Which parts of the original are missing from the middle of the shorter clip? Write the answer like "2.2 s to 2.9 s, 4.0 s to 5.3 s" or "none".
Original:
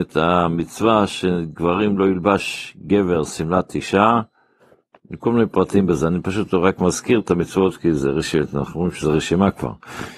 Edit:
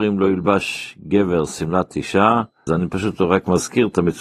4.5 s to 6.0 s